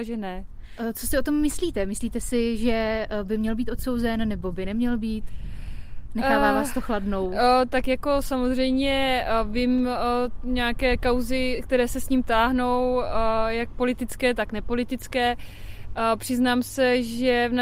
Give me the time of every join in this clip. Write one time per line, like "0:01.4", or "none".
none